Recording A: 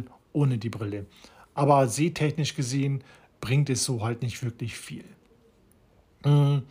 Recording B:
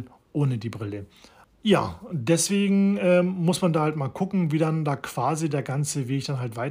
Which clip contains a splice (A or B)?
B